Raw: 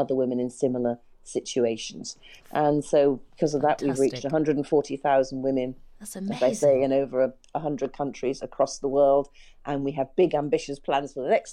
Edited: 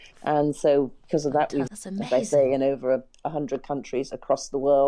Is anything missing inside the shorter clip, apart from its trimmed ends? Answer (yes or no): yes